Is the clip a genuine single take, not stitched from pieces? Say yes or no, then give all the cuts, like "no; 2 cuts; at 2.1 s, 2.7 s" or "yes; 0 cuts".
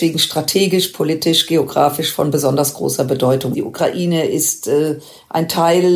no; 1 cut; at 3.5 s